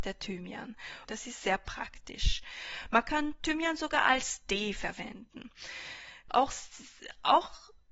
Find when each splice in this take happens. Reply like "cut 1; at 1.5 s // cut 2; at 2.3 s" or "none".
cut 1; at 1.0 s // cut 2; at 6.3 s